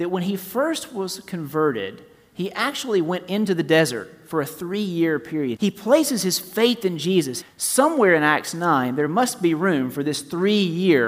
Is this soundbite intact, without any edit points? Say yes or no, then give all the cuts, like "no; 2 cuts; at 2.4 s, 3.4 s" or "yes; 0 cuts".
no; 2 cuts; at 5.6 s, 7.4 s